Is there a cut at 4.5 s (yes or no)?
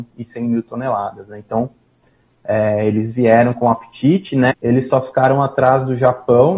yes